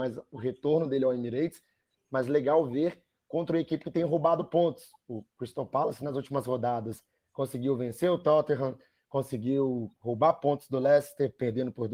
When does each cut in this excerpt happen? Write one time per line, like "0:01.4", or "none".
none